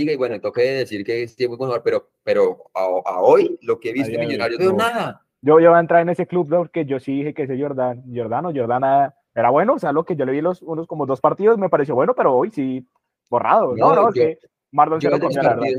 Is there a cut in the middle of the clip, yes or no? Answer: yes